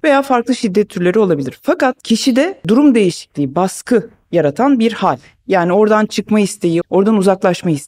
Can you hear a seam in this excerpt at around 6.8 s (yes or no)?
yes